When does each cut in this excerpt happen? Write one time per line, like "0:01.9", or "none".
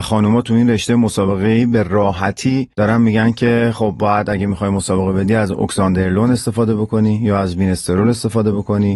none